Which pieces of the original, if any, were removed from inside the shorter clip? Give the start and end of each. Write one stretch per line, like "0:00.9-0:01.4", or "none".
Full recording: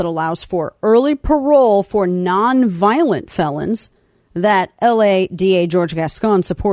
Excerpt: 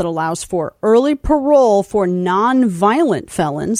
none